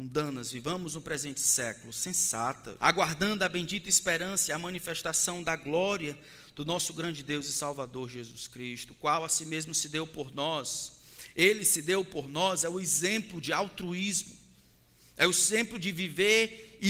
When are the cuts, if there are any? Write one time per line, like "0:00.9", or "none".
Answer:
0:02.8